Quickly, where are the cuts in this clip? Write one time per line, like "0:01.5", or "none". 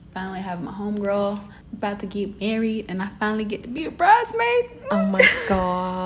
none